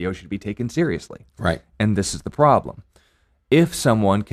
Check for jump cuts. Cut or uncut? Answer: uncut